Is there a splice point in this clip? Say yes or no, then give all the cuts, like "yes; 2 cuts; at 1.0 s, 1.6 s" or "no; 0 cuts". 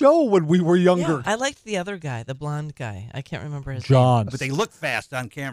yes; 2 cuts; at 1.2 s, 4.3 s